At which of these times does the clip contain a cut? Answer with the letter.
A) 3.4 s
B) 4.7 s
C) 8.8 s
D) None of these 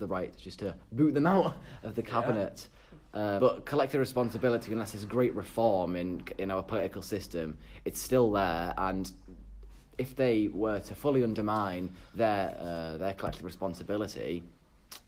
A